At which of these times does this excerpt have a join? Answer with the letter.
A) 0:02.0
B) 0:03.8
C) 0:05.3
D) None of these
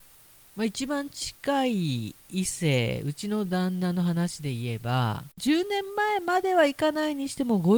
C